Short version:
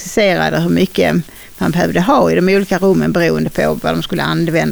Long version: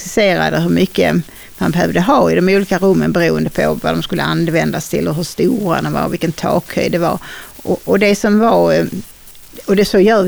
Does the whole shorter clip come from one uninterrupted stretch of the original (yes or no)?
yes